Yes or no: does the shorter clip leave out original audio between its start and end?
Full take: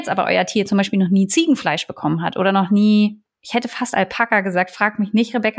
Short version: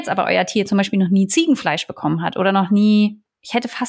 no